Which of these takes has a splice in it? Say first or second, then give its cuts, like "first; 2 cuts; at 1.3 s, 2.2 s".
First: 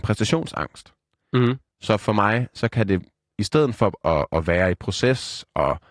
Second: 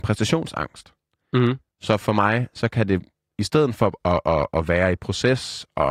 first; 1 cut; at 4.0 s